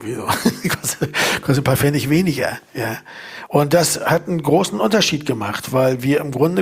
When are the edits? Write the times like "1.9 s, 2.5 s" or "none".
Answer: 3.5 s